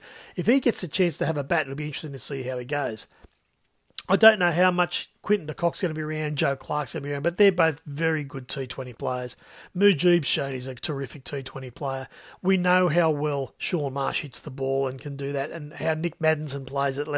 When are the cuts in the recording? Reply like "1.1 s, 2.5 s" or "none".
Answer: none